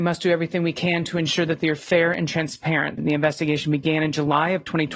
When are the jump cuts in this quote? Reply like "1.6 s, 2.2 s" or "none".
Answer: 3.0 s